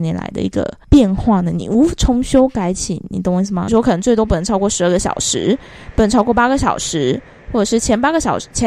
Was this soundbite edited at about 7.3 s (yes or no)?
no